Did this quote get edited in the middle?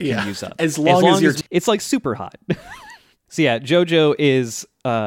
yes; 1 cut; at 1.4 s

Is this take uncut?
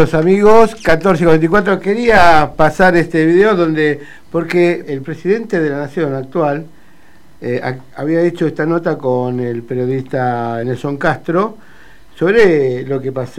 no; 3 cuts; at 4.8 s, 7.9 s, 10.6 s

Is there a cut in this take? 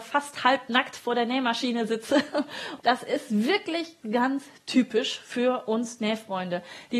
yes; 2 cuts; at 2.8 s, 4.0 s

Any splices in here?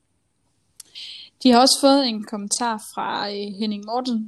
no; 0 cuts

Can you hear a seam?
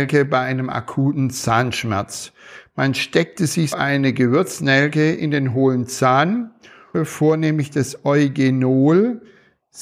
yes; 2 cuts; at 3.7 s, 6.9 s

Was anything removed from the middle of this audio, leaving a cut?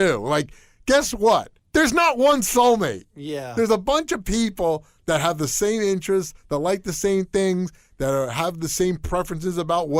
yes; 1 cut; at 1.6 s

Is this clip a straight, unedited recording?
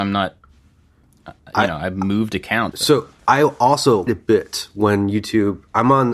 no; 2 cuts; at 2.7 s, 4.1 s

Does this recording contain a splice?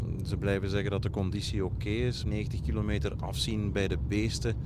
yes; 1 cut; at 2.2 s

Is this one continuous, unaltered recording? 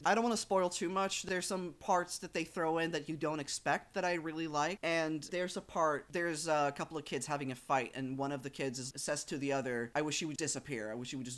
no; 3 cuts; at 4.8 s, 8.9 s, 10.4 s

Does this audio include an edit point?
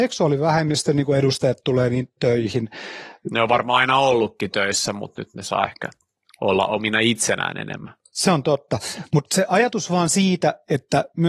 no; 0 cuts

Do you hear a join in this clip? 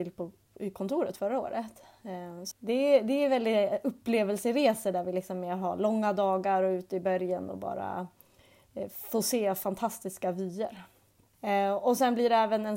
yes; 2 cuts; at 2.5 s, 11.3 s

